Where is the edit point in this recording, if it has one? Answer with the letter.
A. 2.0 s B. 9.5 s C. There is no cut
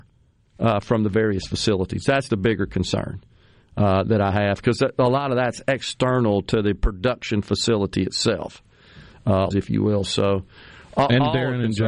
B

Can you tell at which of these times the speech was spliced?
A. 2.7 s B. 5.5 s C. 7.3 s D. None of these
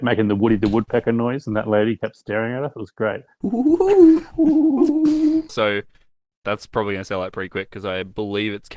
B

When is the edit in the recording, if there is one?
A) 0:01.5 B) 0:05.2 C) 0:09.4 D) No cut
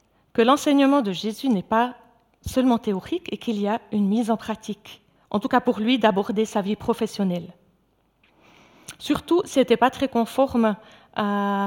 B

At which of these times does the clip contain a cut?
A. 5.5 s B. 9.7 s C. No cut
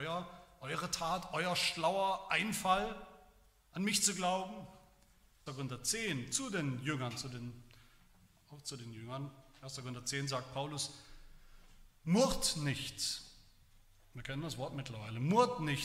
A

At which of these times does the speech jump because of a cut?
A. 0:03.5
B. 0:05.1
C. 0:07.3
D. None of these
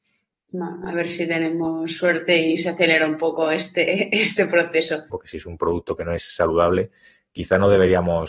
B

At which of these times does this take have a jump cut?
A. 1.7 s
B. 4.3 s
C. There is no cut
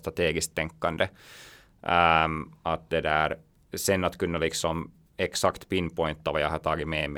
A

